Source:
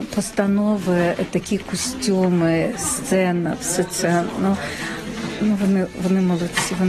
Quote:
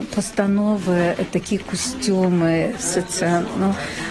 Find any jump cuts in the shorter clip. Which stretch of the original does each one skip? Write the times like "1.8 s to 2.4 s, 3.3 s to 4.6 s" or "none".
2.8 s to 3.6 s